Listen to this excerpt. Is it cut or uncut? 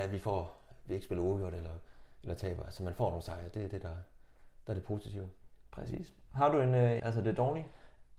cut